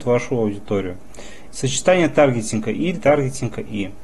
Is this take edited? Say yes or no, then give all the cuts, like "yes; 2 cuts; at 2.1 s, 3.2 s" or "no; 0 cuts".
yes; 2 cuts; at 1.5 s, 3.0 s